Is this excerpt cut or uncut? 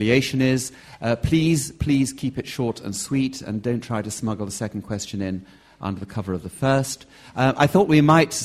uncut